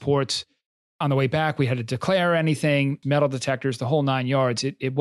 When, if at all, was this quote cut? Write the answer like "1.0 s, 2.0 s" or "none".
3.0 s